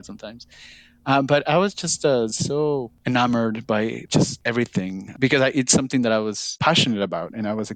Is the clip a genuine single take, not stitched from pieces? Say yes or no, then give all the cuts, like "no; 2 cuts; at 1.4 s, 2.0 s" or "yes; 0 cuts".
yes; 0 cuts